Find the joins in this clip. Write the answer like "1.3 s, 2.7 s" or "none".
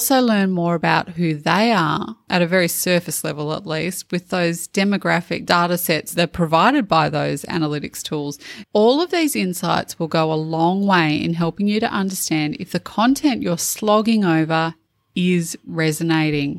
2.3 s, 8.6 s